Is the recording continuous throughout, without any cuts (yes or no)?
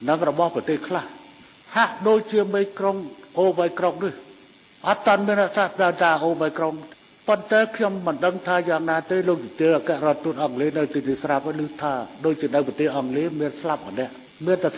yes